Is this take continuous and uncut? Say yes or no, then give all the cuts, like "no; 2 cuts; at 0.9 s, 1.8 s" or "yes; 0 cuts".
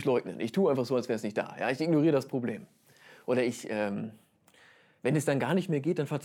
yes; 0 cuts